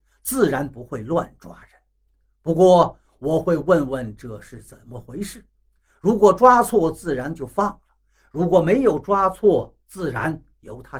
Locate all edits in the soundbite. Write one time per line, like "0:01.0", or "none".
none